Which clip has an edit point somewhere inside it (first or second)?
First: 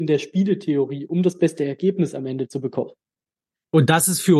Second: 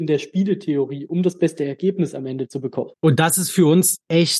second